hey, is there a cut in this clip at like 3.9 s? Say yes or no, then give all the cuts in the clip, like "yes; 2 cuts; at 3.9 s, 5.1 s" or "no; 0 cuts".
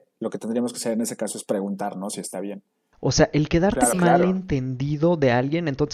yes; 2 cuts; at 2.9 s, 3.9 s